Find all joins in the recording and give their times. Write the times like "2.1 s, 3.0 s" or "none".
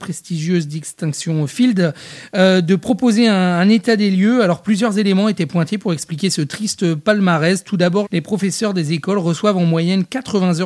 8.0 s